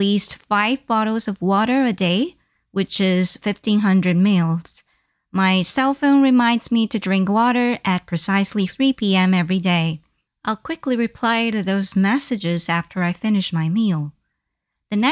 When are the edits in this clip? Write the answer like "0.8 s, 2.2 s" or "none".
10.3 s